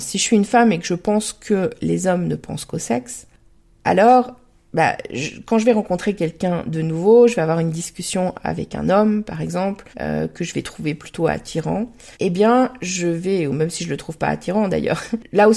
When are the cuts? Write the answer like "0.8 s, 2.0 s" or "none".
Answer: 9.9 s, 12.1 s